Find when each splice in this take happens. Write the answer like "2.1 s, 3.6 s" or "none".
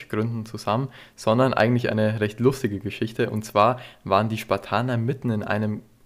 none